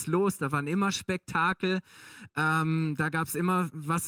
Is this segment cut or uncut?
uncut